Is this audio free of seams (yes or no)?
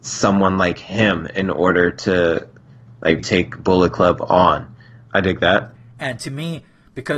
no